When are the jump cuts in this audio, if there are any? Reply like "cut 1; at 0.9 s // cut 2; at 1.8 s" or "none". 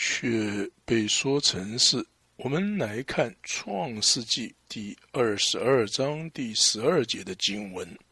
cut 1; at 2.2 s // cut 2; at 3.4 s